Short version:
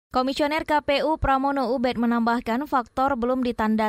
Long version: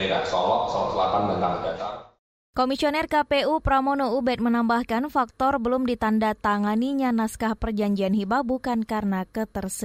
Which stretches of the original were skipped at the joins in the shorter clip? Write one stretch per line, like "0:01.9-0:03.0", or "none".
none